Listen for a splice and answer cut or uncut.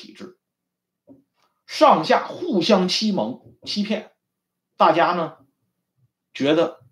uncut